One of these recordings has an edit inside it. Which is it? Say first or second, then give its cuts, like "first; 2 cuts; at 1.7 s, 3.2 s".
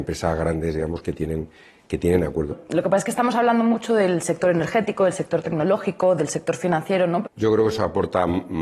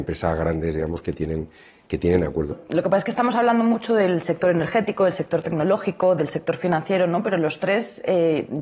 first; 1 cut; at 7.2 s